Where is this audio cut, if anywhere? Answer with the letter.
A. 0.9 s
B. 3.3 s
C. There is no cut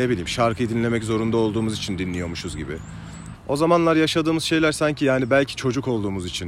B